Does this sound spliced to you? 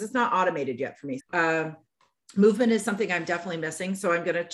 yes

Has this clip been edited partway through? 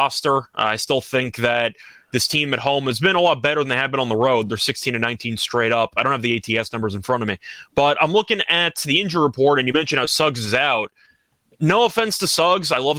no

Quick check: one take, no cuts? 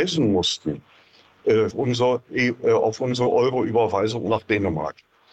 no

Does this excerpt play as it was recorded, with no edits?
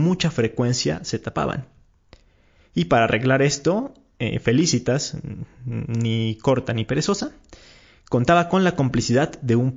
yes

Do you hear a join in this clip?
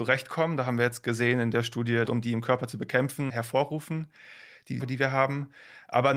yes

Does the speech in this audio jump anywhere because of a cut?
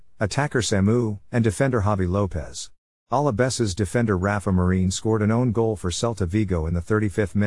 yes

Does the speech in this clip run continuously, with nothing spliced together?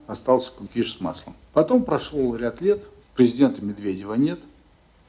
no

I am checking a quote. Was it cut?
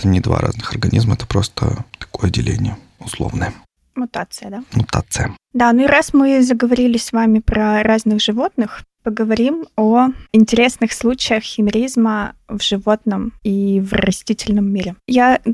no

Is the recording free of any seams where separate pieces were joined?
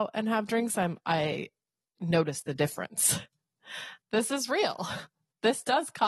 no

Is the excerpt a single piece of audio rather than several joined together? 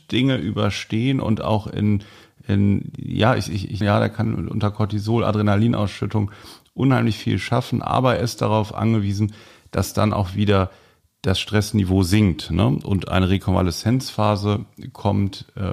no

